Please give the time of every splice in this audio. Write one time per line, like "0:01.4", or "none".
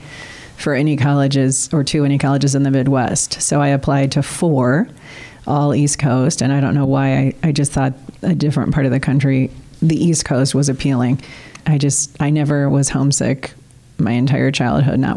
0:11.6